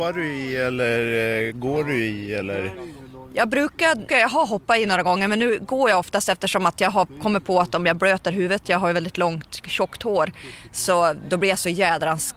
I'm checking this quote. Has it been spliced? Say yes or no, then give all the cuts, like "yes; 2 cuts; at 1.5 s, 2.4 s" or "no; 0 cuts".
yes; 1 cut; at 4.1 s